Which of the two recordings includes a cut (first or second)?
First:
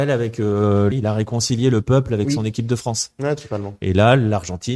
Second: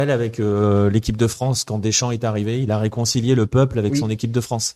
first